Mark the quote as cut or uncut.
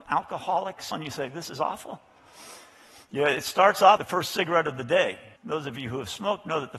cut